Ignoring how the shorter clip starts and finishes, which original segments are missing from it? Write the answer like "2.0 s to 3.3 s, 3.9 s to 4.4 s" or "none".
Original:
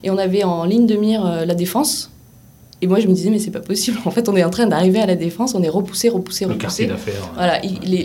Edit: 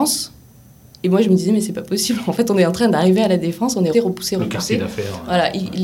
5.7 s to 6.0 s